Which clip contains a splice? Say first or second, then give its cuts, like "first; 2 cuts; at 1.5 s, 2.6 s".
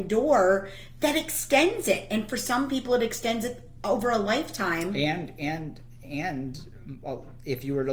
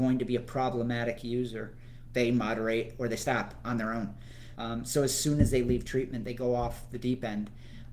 second; 2 cuts; at 2.1 s, 4.5 s